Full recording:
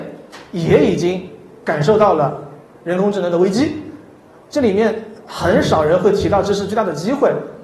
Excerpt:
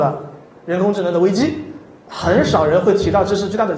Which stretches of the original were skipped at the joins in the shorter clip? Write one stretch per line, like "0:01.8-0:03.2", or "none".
0:04.3-0:05.3